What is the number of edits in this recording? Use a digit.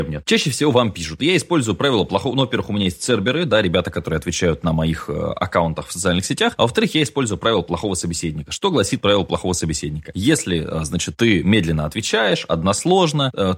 0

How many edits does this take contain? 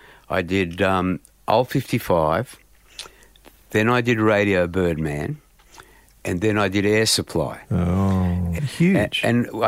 1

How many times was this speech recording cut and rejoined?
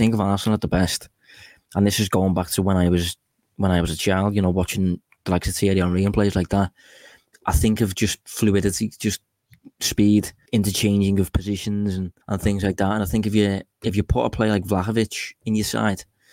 2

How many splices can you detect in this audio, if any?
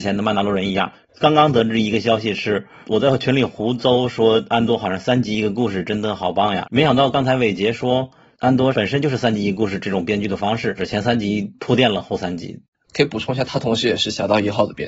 3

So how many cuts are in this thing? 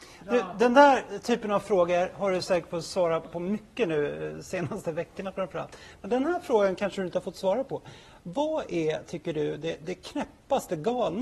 0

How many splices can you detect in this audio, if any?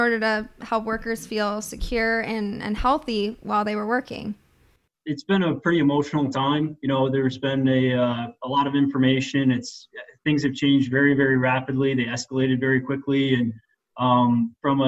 0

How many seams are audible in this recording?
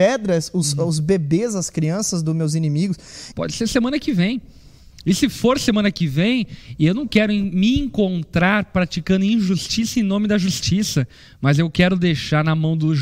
1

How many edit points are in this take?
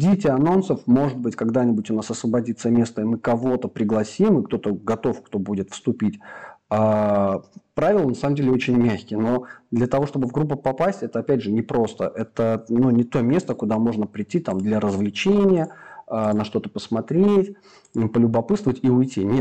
0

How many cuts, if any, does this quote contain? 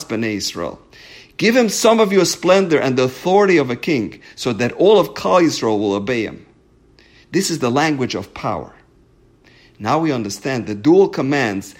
0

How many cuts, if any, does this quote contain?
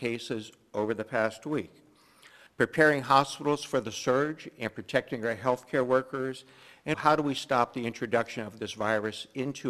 2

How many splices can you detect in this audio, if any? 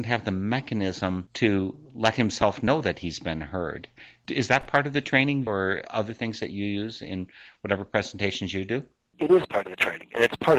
1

